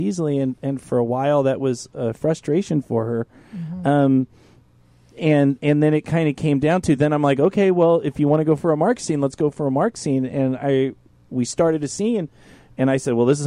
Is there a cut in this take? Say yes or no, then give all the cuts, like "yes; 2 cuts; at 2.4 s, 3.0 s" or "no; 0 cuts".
no; 0 cuts